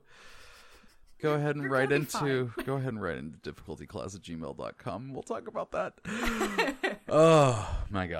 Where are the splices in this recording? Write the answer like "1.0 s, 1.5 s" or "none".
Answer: 1.2 s